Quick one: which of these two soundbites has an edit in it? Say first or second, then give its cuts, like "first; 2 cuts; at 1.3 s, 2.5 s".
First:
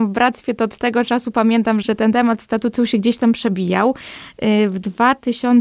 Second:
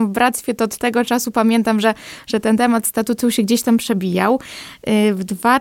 first; 1 cut; at 1.8 s